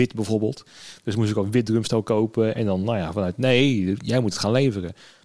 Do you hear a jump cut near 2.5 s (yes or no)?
yes